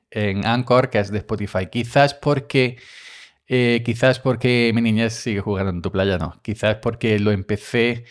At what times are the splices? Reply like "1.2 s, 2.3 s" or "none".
none